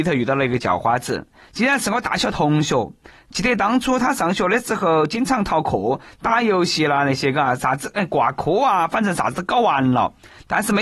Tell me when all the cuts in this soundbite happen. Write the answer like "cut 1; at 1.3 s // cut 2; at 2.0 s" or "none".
none